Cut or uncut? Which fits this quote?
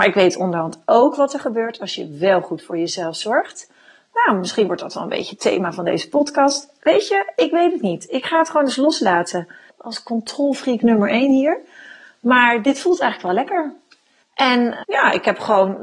cut